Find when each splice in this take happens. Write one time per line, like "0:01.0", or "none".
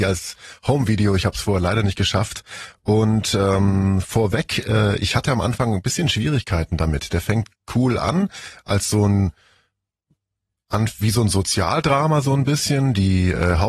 none